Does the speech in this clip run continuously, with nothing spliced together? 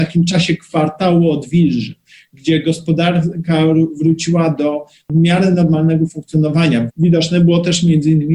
no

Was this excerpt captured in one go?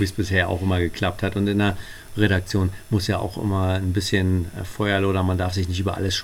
yes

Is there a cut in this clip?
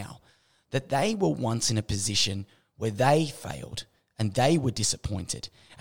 no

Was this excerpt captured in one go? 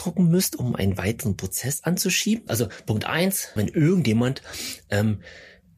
no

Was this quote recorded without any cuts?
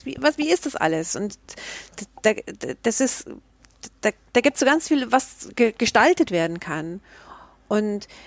yes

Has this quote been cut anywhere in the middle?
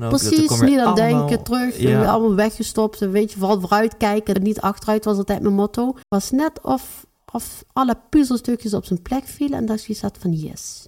yes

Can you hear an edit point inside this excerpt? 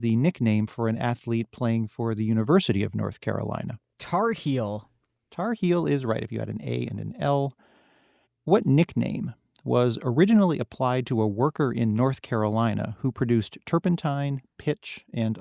yes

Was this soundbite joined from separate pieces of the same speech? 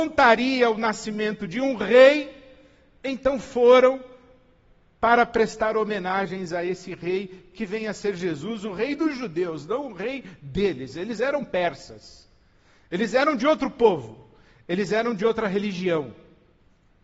no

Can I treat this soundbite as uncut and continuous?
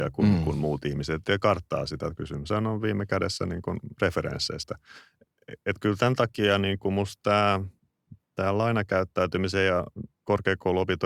no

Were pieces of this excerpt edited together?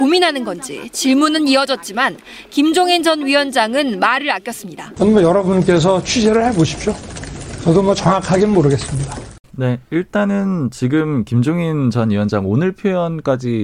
yes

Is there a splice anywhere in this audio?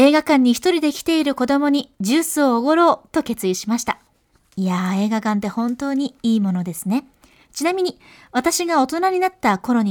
no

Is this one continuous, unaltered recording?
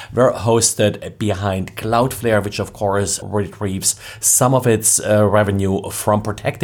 no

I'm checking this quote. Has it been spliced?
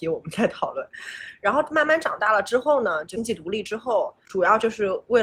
no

